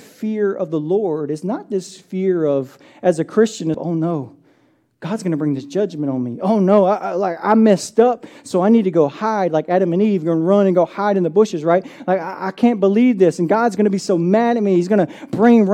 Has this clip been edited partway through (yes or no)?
yes